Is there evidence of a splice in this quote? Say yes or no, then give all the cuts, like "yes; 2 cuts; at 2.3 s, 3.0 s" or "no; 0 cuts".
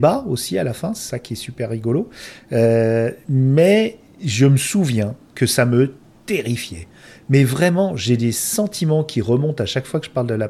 no; 0 cuts